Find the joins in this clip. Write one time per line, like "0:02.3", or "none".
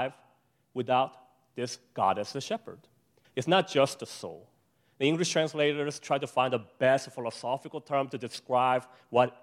0:03.2